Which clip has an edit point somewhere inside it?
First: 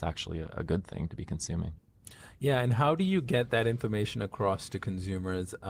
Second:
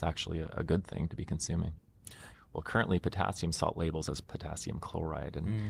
second; 1 cut; at 2.3 s

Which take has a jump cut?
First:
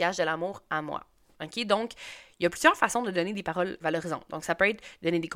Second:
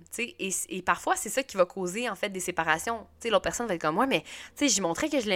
first; 2 cuts; at 1.3 s, 3.8 s

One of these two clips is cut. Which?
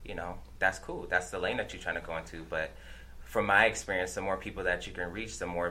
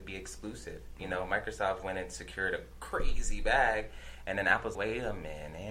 second; 1 cut; at 4.7 s

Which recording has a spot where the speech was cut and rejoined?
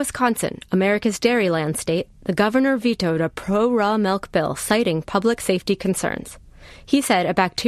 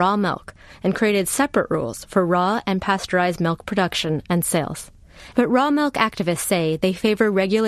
second; 1 cut; at 5.3 s

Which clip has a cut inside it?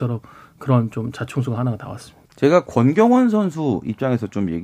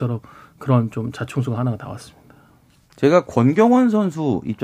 first; 1 cut; at 2.3 s

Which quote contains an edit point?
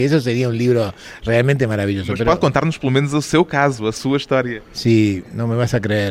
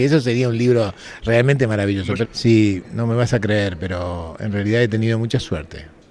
second; 1 cut; at 2.2 s

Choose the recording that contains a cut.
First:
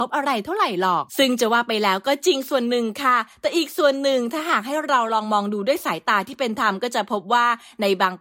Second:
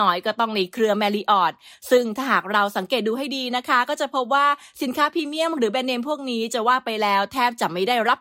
first; 1 cut; at 1.1 s

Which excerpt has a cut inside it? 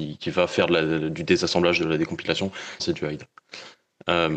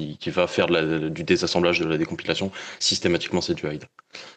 first; 1 cut; at 2.8 s

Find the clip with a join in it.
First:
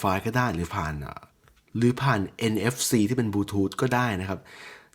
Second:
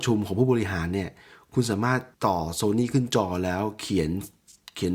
second; 1 cut; at 2.1 s

